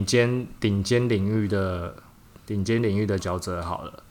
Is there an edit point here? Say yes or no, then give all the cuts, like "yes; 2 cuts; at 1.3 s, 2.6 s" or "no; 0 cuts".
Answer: yes; 1 cut; at 3.2 s